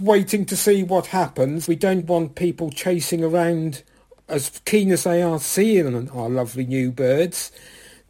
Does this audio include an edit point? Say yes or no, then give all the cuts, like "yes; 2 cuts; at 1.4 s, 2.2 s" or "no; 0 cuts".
yes; 1 cut; at 1.7 s